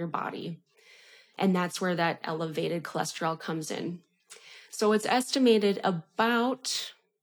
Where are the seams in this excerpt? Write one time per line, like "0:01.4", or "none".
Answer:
none